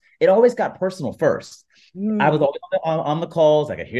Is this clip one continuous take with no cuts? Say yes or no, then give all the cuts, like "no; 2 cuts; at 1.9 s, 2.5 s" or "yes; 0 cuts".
yes; 0 cuts